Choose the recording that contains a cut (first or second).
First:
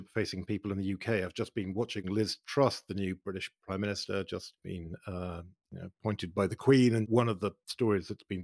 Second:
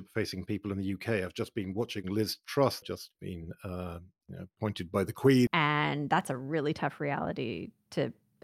second